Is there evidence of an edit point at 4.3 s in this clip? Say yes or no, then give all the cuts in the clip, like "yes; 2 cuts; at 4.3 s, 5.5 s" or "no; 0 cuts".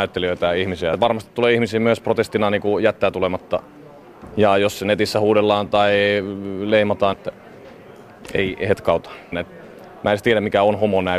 no; 3 cuts; at 0.9 s, 7.1 s, 9.3 s